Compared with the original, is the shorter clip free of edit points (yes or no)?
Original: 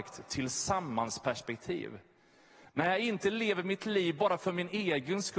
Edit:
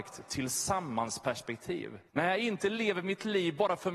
no